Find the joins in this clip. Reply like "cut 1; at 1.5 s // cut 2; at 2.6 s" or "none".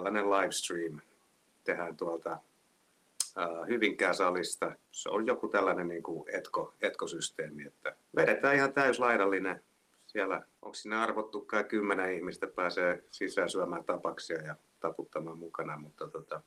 cut 1; at 4.9 s // cut 2; at 8.0 s